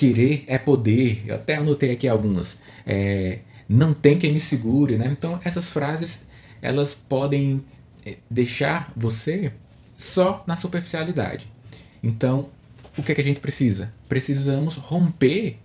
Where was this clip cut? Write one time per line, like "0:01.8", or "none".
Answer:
none